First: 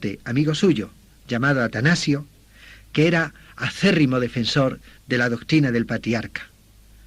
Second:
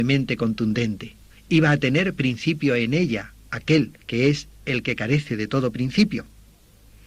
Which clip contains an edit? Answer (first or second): second